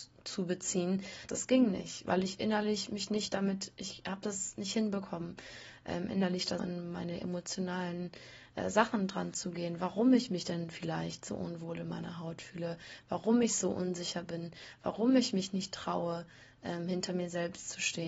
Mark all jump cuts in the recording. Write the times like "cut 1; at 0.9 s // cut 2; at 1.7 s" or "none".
cut 1; at 1.3 s // cut 2; at 6.6 s